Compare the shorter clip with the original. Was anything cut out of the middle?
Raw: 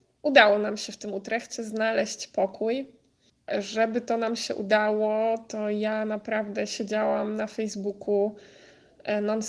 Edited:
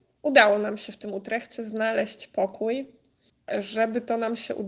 no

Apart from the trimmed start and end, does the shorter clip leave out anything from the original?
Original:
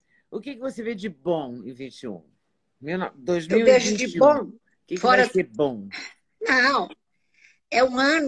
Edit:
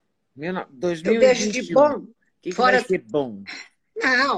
no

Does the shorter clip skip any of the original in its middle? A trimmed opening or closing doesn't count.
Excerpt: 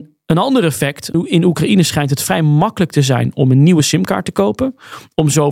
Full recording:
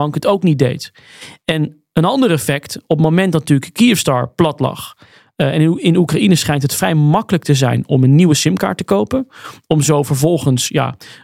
yes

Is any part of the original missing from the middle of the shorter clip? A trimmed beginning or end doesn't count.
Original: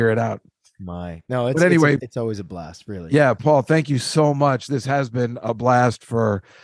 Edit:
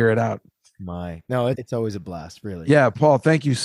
yes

